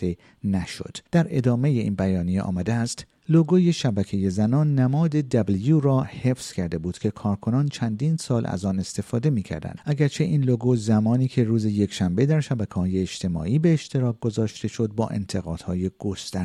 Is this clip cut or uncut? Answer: cut